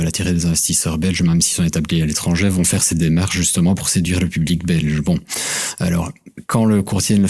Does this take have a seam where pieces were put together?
no; 0 cuts

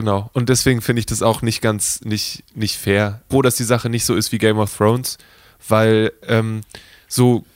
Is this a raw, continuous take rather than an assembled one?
no; 1 cut; at 3.3 s

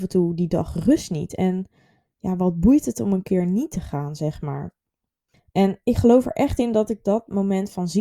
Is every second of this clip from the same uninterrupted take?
yes; 0 cuts

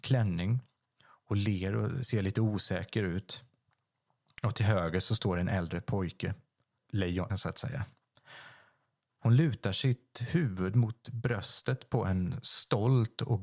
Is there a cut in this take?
yes; 2 cuts; at 7.3 s, 9.2 s

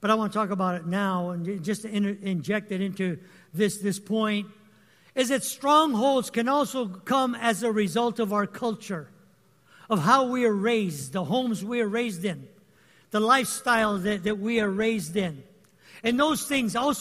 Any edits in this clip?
no; 0 cuts

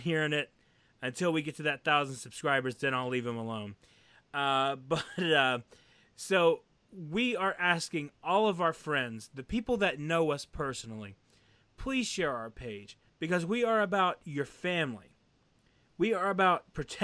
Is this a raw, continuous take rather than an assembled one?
no; 1 cut; at 13.1 s

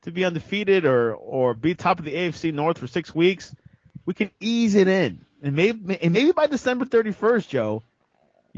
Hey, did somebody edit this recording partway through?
no; 0 cuts

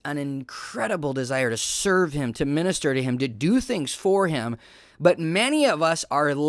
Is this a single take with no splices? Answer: yes; 0 cuts

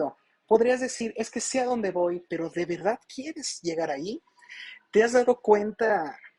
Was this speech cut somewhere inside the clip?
yes; 1 cut; at 2.3 s

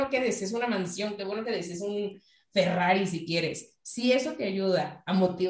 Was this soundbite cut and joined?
no; 0 cuts

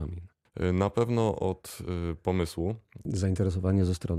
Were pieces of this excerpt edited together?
yes; 1 cut; at 3.1 s

